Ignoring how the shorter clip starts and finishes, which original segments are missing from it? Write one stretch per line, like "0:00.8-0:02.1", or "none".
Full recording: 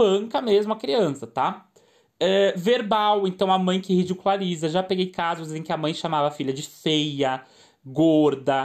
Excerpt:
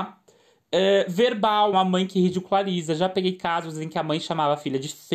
0:03.2-0:03.5